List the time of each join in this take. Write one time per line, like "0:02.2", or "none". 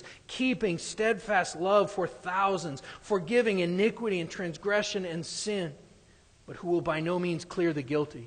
none